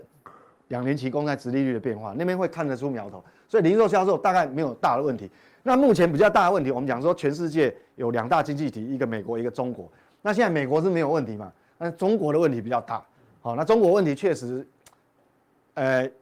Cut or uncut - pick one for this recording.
uncut